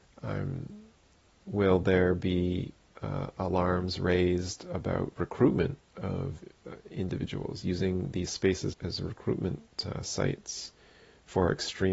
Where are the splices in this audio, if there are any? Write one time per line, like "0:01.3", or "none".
0:08.7